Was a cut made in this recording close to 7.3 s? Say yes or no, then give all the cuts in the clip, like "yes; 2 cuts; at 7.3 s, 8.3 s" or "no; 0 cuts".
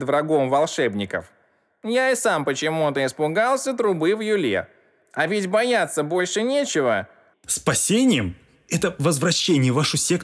yes; 1 cut; at 7.3 s